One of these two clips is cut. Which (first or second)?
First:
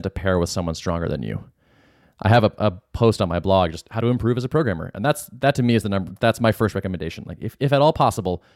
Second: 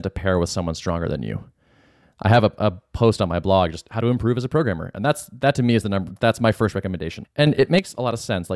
second